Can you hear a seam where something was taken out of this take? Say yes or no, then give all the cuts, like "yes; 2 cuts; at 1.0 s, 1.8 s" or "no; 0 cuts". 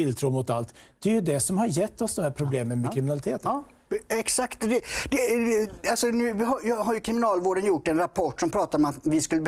no; 0 cuts